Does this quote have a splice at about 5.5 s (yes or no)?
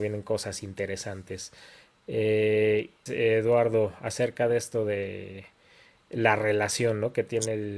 no